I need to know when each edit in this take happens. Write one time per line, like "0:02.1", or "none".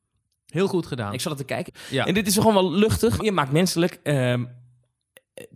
0:01.7
0:03.2